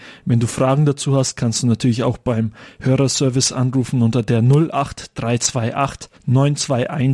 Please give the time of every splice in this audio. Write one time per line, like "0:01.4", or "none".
0:06.1